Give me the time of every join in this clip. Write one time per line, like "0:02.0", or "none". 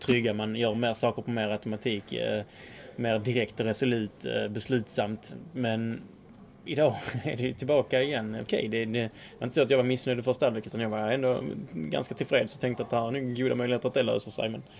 0:08.5